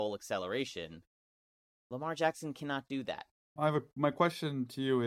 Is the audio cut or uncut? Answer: cut